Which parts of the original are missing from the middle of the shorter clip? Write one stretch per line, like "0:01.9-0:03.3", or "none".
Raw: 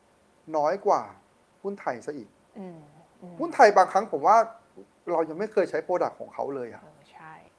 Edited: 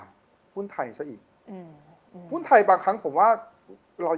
none

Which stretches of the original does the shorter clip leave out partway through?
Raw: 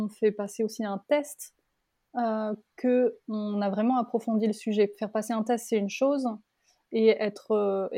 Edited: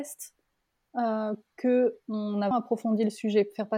0:03.7-0:03.9

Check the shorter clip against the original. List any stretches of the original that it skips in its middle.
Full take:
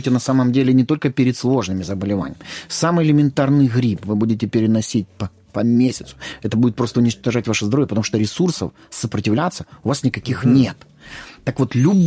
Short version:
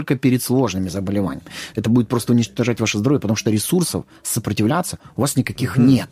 0:02.7-0:06.4

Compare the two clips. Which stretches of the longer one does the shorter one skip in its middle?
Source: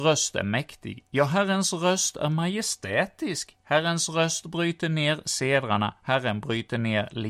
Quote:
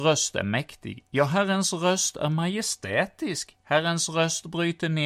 none

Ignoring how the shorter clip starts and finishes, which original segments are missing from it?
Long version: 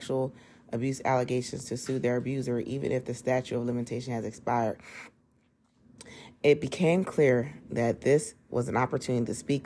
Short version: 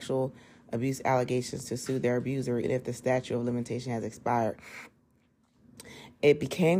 0:02.6-0:02.8

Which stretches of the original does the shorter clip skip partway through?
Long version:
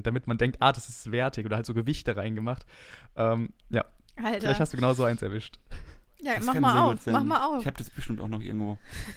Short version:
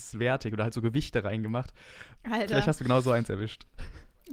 0:03.1-0:04.1

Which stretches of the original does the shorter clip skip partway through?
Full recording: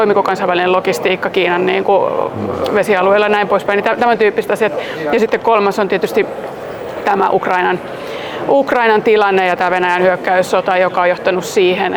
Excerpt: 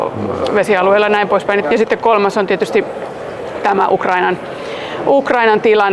0:03.8-0:05.0

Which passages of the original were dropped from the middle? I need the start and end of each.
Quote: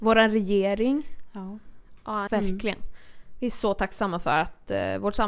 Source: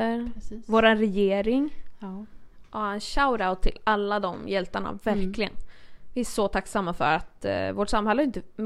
0:02.9-0:05.0

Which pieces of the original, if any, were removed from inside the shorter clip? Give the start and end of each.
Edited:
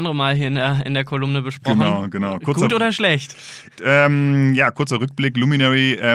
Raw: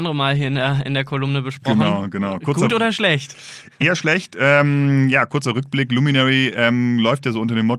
0:03.8-0:04.3

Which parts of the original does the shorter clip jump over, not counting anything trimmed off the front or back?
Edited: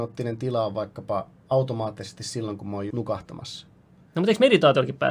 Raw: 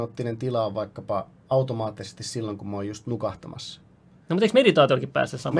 0:02.9-0:03.0

